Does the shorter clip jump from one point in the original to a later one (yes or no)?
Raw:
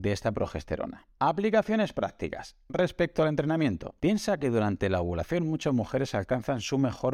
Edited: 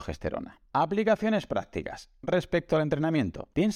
no